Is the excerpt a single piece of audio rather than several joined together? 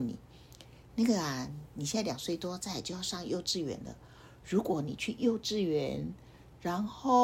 yes; 0 cuts

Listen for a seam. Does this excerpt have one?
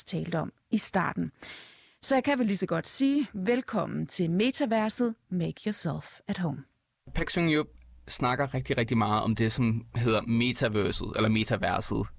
no; 0 cuts

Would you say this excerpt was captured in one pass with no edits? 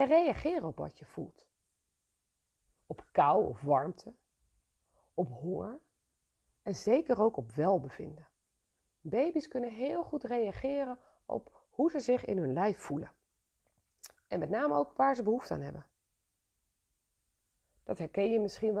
yes; 0 cuts

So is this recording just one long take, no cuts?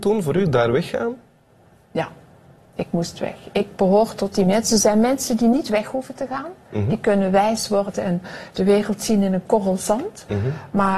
yes; 0 cuts

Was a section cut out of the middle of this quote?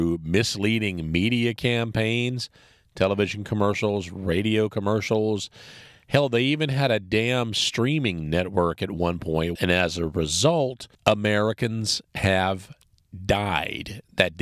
yes; 2 cuts; at 9.6 s, 10.9 s

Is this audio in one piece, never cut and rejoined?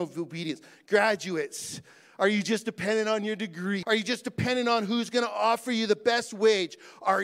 no; 1 cut; at 3.8 s

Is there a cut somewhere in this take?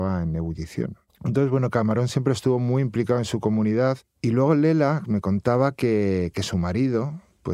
yes; 1 cut; at 1.1 s

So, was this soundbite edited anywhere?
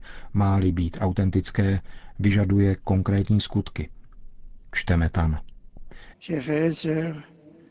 yes; 2 cuts; at 4.6 s, 6.1 s

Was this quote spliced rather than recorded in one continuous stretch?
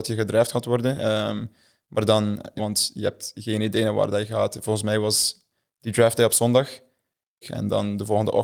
yes; 2 cuts; at 2.6 s, 7.4 s

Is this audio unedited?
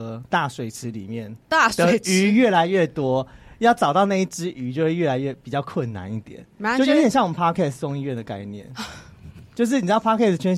yes; 0 cuts

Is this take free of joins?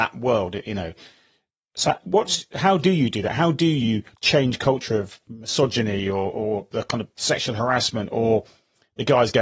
yes; 0 cuts

